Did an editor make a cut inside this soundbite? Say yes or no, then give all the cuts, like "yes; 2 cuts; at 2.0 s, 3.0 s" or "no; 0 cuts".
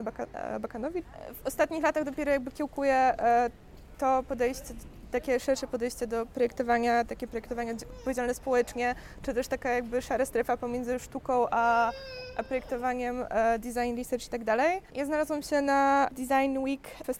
no; 0 cuts